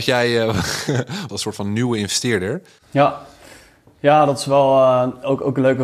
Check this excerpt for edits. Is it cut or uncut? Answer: cut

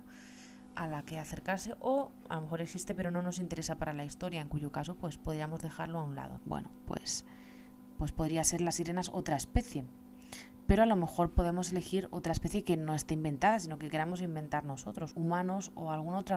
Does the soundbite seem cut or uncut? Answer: cut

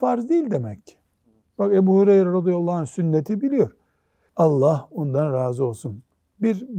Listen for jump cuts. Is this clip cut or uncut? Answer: cut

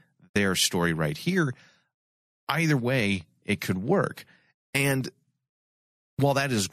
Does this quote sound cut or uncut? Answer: uncut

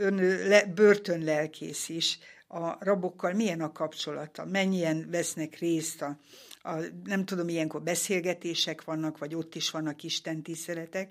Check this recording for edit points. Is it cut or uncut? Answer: uncut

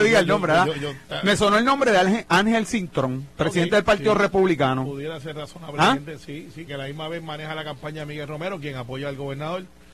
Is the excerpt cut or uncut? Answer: cut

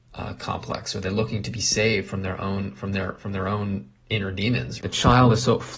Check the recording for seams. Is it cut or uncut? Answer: cut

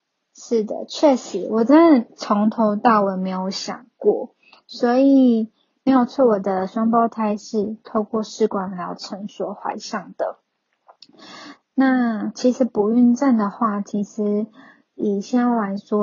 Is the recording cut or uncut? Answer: uncut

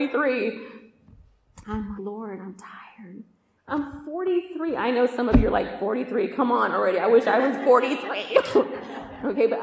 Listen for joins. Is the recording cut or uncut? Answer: cut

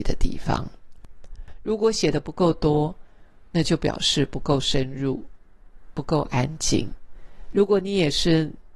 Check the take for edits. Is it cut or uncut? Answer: uncut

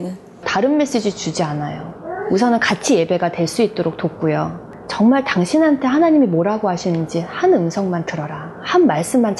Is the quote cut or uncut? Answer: uncut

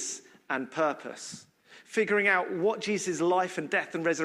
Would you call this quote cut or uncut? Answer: uncut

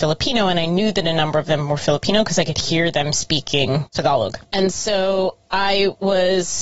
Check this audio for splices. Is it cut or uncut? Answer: uncut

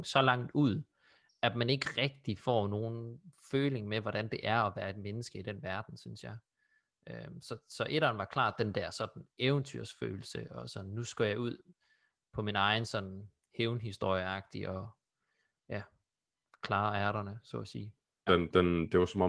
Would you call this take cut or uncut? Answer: cut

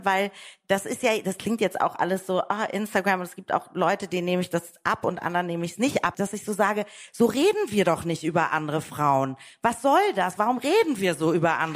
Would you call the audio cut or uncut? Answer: cut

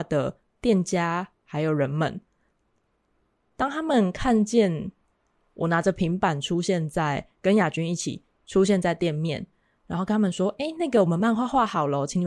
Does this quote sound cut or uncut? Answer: uncut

